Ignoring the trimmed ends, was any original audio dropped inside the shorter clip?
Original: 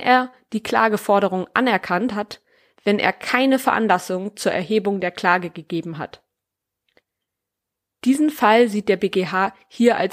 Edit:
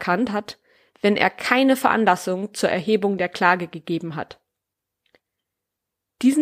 no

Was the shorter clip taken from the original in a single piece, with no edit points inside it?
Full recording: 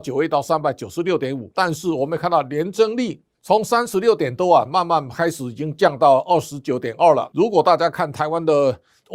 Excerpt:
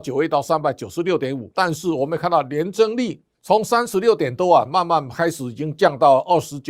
yes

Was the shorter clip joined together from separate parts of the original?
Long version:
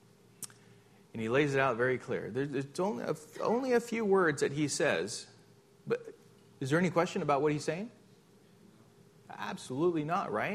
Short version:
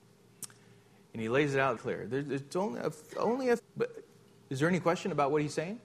yes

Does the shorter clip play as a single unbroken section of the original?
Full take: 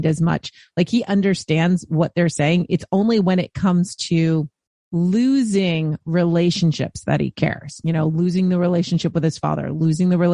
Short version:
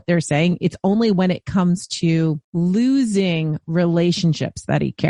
no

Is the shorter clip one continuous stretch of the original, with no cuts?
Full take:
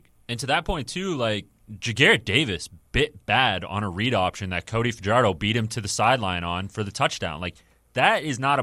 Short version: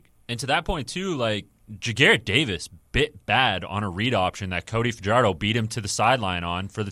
yes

